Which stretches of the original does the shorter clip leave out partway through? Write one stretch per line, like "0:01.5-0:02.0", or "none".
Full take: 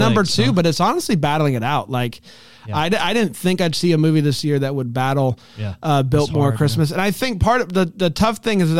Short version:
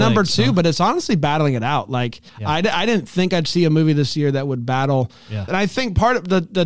0:02.3-0:02.6
0:05.8-0:06.9